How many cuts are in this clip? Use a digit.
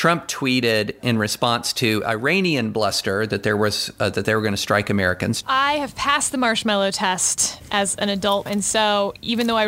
2